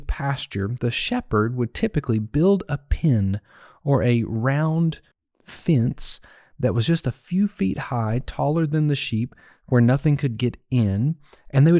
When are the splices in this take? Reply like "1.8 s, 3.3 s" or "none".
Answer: none

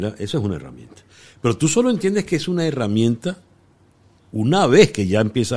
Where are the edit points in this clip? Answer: none

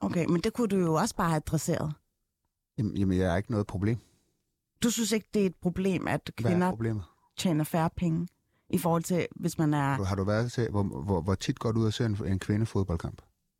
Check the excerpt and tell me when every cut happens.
none

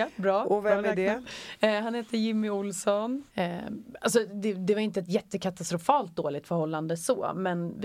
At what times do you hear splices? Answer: 3.3 s

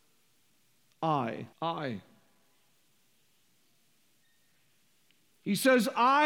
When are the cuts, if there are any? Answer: 1.5 s

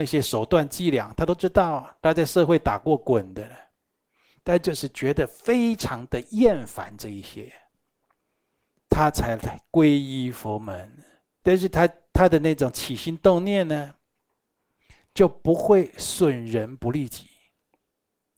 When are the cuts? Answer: 11.4 s

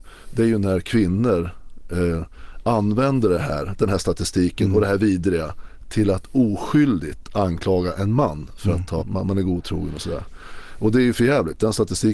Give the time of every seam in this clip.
9.0 s

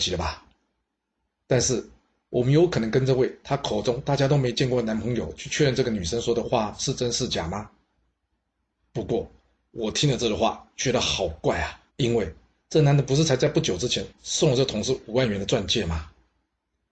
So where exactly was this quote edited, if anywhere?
8.3 s, 11.9 s

